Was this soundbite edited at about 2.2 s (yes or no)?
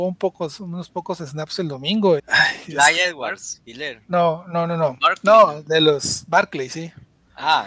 yes